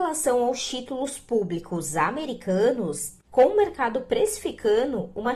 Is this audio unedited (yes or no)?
no